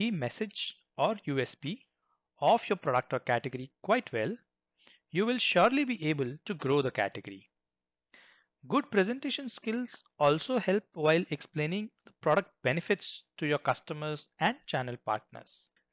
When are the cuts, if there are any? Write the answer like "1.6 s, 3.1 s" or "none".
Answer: none